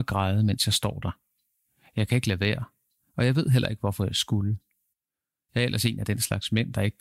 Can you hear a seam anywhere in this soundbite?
no; 0 cuts

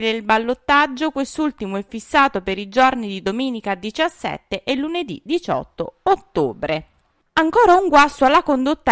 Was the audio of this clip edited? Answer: no; 0 cuts

